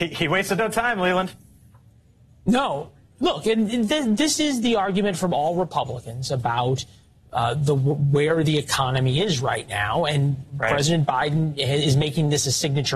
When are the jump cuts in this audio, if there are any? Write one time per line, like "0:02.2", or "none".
none